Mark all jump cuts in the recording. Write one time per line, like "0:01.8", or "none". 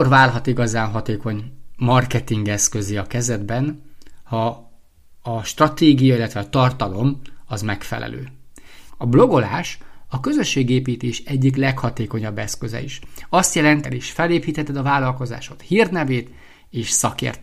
0:08.9
0:13.8